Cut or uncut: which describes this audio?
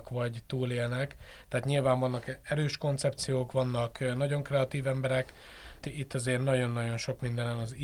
cut